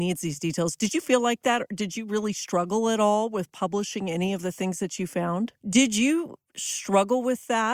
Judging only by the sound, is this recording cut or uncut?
cut